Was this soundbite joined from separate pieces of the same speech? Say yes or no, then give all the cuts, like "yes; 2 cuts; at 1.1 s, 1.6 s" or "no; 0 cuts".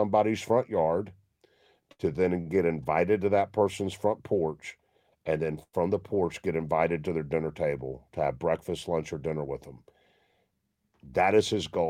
no; 0 cuts